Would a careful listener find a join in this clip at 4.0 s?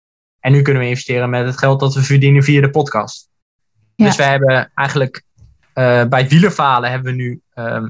yes; 1 cut; at 4.0 s

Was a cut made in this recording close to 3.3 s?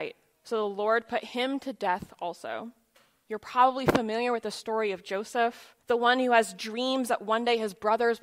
yes; 2 cuts; at 3.3 s, 5.8 s

